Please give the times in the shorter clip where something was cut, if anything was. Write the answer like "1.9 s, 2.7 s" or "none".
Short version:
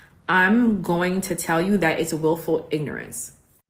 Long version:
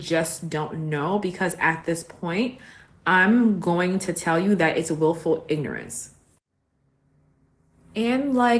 none